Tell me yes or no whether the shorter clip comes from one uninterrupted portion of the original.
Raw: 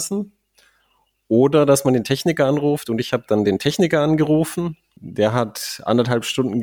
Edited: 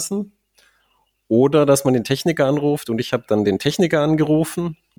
yes